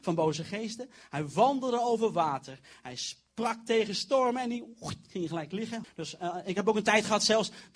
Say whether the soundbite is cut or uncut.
cut